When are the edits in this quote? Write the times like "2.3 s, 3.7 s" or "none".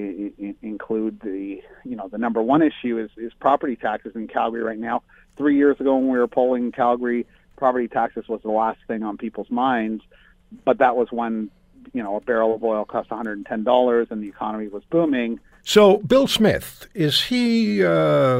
15.6 s